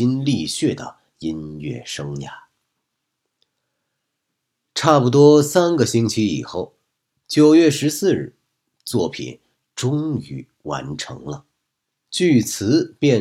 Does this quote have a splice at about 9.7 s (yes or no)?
no